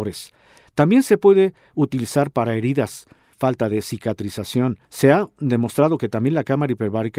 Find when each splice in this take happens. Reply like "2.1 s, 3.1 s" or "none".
3.3 s, 4.9 s